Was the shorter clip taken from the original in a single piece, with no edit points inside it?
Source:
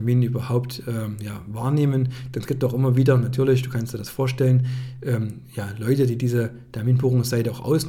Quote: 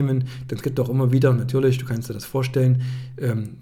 yes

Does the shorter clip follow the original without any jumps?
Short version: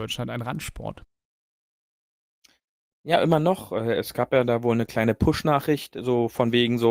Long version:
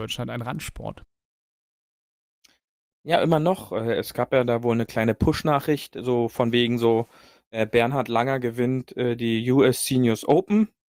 yes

